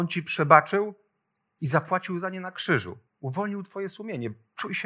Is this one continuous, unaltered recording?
yes; 0 cuts

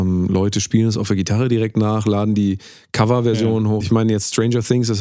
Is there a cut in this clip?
yes; 1 cut; at 3.8 s

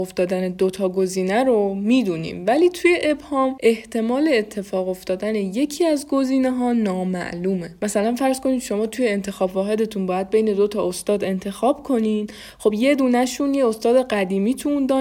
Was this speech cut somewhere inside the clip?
no; 0 cuts

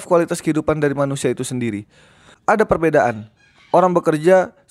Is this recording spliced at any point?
yes; 1 cut; at 2.3 s

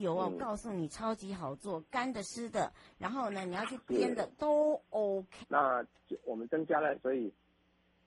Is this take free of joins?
no; 2 cuts; at 5.4 s, 7.0 s

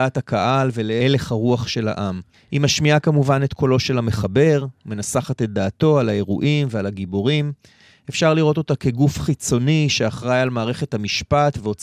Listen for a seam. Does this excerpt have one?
yes; 1 cut; at 2.3 s

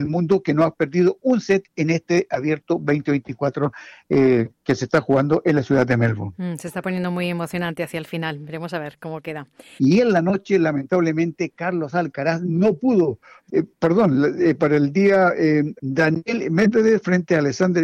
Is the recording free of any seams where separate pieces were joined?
no; 3 cuts; at 9.8 s, 13.5 s, 15.8 s

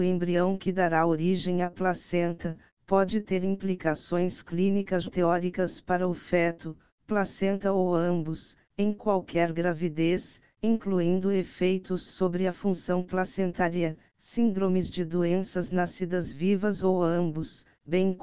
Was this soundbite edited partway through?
no; 0 cuts

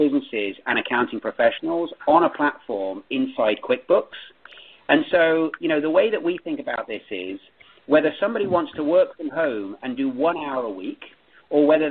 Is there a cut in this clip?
no; 0 cuts

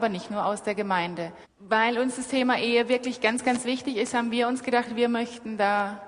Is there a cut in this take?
yes; 1 cut; at 1.4 s

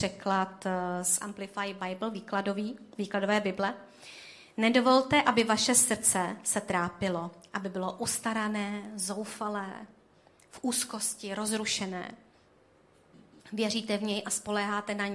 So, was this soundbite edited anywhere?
yes; 1 cut; at 13.4 s

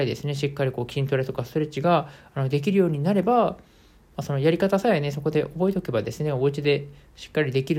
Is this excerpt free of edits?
yes; 0 cuts

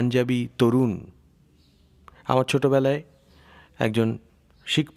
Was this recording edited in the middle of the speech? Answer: no; 0 cuts

